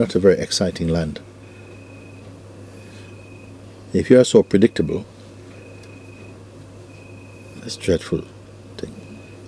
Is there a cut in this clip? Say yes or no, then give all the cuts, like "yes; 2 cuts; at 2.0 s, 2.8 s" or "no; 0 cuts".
yes; 1 cut; at 7.6 s